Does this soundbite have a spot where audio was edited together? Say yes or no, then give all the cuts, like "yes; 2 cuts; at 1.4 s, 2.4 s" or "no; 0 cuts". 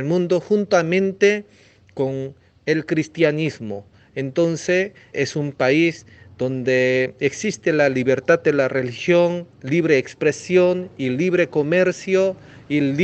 yes; 2 cuts; at 5.1 s, 9.5 s